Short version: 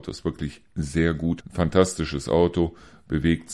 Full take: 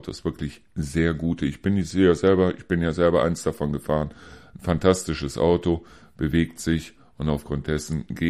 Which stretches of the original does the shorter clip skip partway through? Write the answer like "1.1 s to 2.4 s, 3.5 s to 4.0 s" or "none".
1.4 s to 4.5 s

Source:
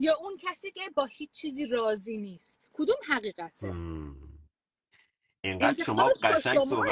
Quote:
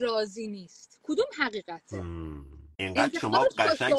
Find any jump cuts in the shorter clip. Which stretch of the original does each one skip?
4.4 s to 5.4 s

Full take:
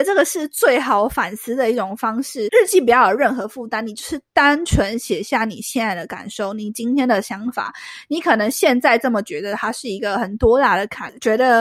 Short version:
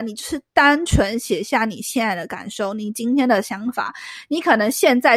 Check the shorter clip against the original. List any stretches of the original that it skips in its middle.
none

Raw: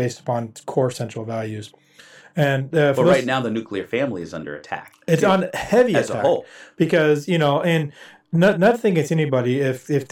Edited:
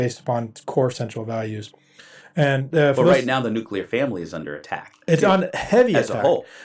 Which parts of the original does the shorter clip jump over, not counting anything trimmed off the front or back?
none

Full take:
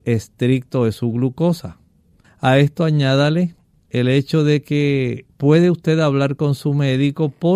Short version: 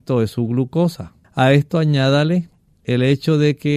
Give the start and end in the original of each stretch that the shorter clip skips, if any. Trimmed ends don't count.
1.9 s to 2.3 s

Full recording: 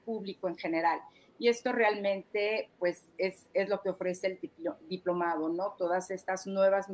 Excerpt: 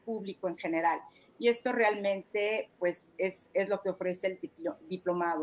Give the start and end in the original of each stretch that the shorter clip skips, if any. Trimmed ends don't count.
none

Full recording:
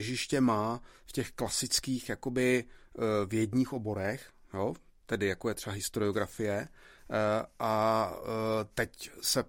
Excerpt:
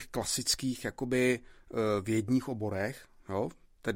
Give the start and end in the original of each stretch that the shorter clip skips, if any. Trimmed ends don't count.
none

